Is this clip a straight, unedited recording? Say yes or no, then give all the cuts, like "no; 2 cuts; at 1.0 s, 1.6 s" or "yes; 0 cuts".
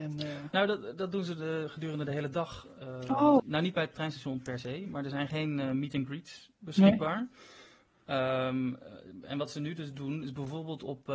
no; 1 cut; at 3.4 s